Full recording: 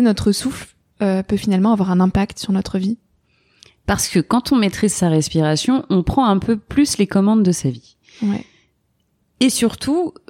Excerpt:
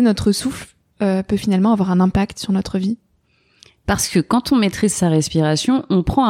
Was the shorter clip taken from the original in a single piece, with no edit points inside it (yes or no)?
yes